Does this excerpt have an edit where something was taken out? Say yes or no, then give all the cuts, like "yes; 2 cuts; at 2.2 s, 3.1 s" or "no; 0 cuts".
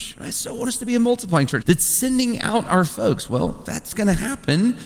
yes; 1 cut; at 1.6 s